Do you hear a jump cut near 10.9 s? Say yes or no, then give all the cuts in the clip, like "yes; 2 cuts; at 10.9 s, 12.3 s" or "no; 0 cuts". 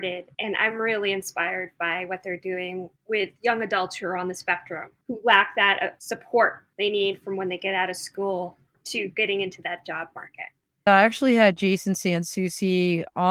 yes; 1 cut; at 10.9 s